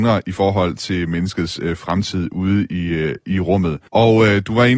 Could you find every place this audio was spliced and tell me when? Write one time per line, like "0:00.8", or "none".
0:03.9